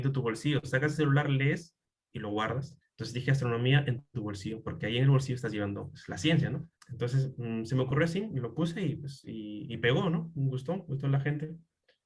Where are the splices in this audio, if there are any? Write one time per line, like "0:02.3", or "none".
0:02.8
0:06.8